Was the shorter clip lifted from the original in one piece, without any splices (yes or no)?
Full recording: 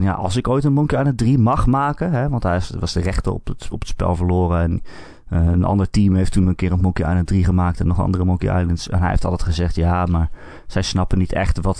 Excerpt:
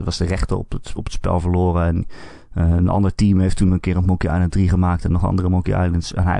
yes